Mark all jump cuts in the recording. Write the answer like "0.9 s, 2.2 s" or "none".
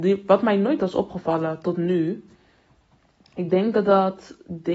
none